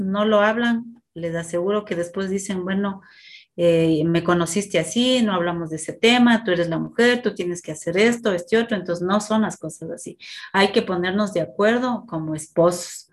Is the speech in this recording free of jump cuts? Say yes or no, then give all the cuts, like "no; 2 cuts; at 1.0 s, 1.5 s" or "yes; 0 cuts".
yes; 0 cuts